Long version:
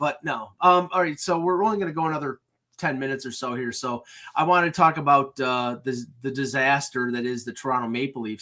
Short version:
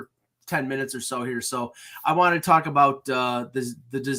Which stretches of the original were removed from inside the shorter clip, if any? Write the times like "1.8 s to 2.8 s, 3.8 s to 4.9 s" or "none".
none